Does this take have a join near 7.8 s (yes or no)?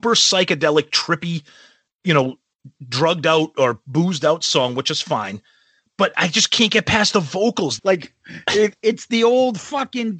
yes